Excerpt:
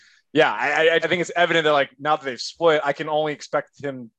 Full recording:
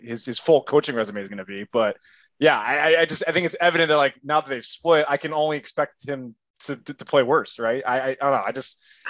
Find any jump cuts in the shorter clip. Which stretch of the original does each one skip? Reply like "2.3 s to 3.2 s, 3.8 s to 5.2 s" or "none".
3.1 s to 3.2 s